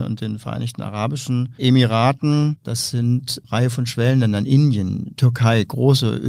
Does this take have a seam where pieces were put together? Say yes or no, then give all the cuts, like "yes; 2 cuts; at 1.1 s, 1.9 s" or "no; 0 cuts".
yes; 1 cut; at 2.6 s